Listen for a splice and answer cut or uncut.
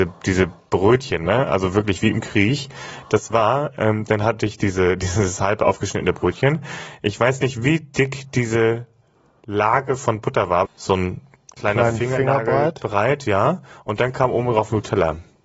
cut